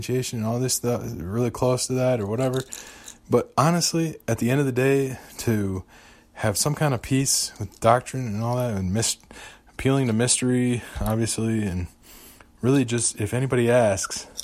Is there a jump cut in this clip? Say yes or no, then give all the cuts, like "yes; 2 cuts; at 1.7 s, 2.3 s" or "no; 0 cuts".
no; 0 cuts